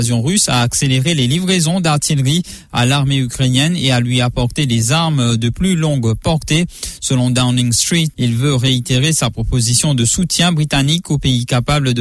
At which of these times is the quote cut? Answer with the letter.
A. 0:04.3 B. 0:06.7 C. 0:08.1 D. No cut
C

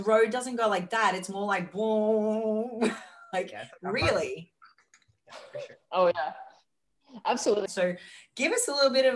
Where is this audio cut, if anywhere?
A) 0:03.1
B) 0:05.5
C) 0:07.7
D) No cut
C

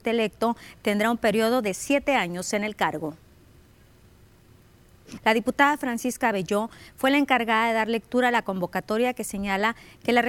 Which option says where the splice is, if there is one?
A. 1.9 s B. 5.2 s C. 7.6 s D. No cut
B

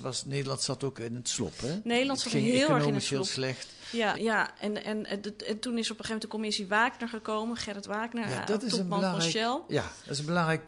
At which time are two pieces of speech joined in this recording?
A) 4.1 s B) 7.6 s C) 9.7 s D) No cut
A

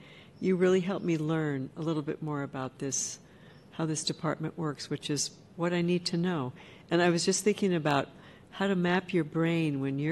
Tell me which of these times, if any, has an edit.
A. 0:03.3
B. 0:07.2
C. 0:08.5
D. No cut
D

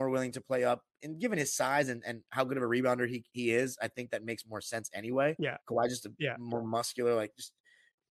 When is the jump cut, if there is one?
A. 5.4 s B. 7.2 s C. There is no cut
C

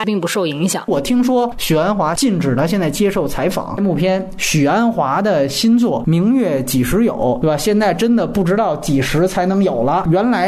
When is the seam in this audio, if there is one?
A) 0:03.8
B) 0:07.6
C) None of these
A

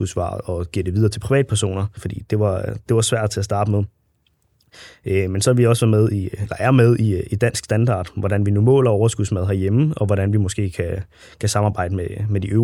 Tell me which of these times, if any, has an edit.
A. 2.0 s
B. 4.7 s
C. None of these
A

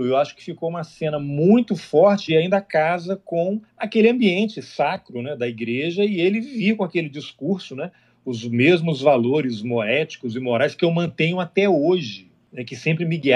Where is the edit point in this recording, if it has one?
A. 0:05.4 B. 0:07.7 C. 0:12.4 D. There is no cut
D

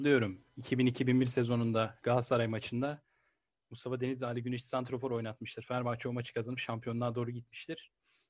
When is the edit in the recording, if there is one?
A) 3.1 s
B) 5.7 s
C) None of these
C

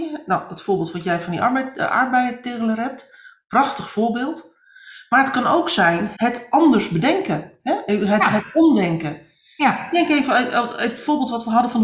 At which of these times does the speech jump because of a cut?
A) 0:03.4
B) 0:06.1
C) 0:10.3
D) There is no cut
B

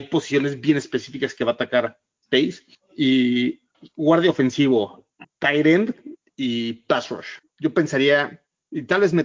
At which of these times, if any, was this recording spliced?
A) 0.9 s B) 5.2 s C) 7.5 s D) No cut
B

